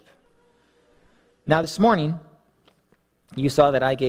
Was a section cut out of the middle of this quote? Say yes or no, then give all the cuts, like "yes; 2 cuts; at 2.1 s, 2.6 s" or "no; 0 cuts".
no; 0 cuts